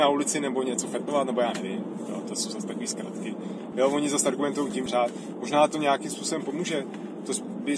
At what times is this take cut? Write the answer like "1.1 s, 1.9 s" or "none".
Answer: 3.7 s, 4.9 s